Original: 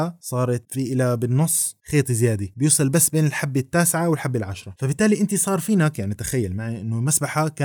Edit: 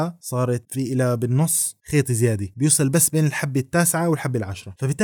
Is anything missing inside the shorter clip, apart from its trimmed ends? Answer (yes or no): no